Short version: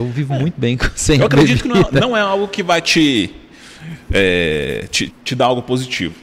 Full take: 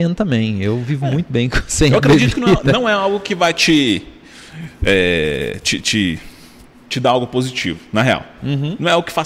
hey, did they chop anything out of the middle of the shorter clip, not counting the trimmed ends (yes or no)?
yes